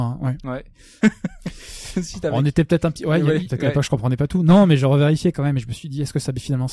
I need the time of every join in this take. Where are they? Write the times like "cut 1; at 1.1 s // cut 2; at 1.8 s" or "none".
cut 1; at 1.0 s // cut 2; at 3.4 s